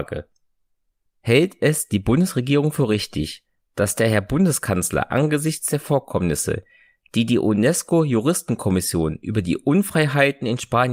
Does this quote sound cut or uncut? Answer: cut